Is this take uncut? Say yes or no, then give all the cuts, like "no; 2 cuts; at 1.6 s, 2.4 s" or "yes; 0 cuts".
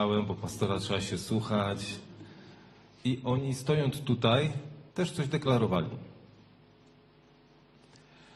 no; 2 cuts; at 3.0 s, 4.9 s